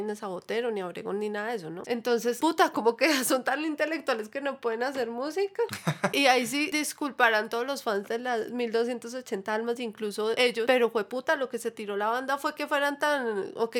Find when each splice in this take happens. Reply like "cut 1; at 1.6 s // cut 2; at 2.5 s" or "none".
cut 1; at 1.8 s